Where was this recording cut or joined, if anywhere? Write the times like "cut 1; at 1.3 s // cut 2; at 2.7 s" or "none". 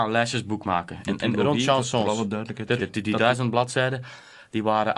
cut 1; at 2.8 s